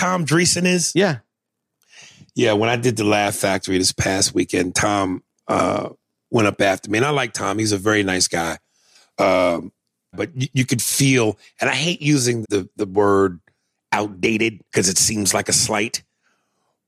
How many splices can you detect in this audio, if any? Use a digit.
3